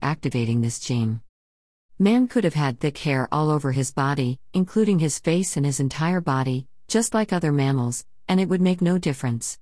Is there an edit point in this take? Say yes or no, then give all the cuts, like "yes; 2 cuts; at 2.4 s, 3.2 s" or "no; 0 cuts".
no; 0 cuts